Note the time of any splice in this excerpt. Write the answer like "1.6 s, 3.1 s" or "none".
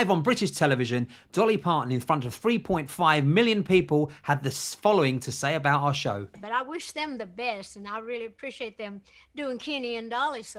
none